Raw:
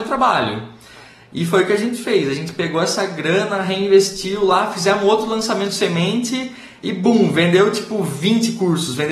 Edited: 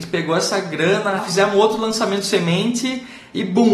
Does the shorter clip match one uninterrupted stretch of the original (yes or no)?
no